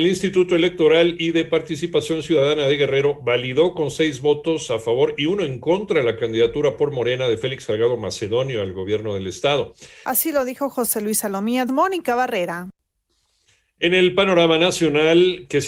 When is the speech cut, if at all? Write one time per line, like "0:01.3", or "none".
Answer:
0:10.0
0:11.7